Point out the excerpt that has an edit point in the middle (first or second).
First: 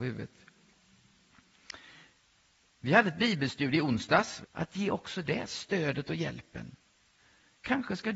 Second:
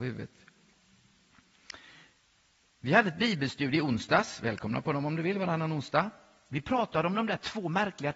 first